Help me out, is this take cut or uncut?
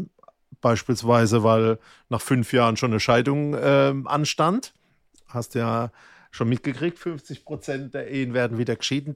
uncut